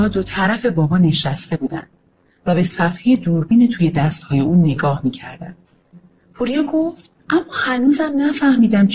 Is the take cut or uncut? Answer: cut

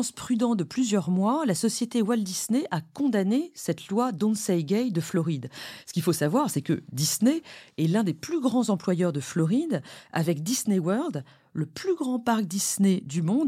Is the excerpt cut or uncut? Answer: uncut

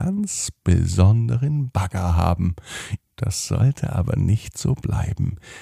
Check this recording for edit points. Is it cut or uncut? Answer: cut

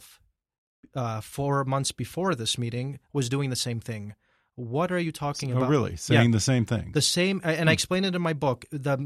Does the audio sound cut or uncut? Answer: uncut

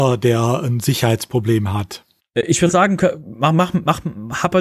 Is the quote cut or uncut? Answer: cut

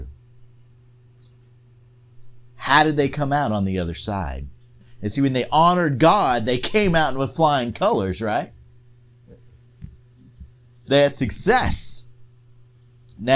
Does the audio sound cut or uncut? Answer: uncut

